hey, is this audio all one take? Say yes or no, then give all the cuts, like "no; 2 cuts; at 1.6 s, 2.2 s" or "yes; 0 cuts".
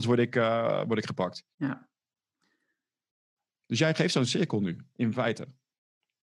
no; 1 cut; at 1.5 s